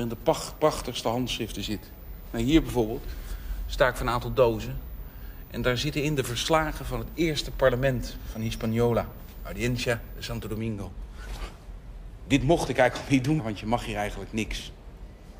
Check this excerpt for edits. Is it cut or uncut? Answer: cut